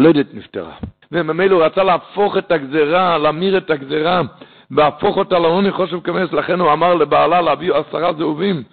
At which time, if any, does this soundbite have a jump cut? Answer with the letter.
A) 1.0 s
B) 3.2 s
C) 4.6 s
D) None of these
A